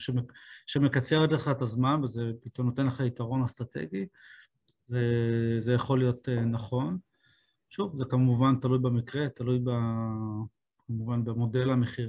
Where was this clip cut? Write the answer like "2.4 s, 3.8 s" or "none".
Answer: none